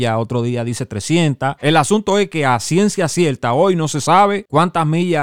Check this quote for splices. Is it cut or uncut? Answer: cut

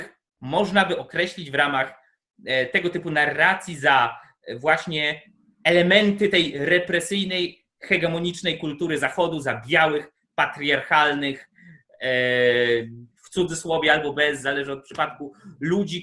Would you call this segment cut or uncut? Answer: cut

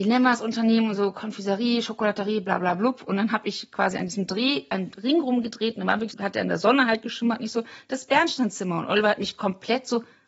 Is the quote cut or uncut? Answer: cut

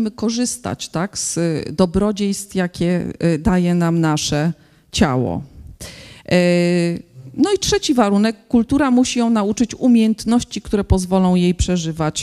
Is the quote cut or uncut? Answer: uncut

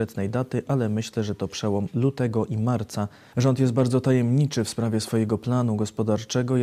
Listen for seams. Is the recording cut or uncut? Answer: cut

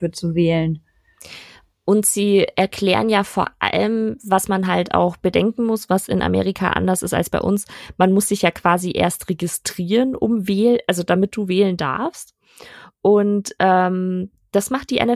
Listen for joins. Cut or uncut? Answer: uncut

